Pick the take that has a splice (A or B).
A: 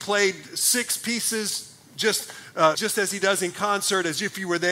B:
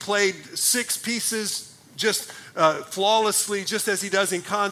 A